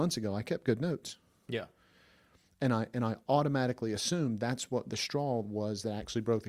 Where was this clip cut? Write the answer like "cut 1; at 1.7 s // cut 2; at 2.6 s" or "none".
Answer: none